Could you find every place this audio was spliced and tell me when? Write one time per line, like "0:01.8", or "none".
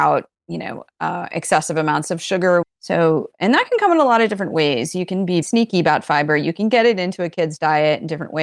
0:02.6
0:05.4